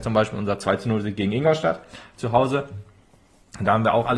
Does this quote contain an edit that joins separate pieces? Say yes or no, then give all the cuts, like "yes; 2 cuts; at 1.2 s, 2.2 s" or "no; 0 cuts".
no; 0 cuts